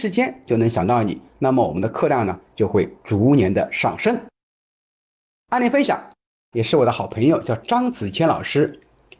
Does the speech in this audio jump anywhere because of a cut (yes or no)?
yes